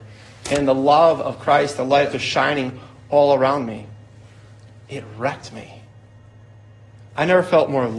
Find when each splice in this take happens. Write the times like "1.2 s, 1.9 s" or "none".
2.1 s, 4.8 s